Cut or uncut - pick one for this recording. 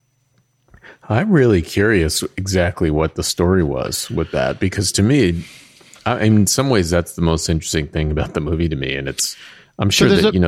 uncut